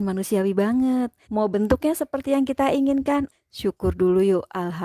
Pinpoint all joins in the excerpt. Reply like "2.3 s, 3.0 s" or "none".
1.2 s, 3.3 s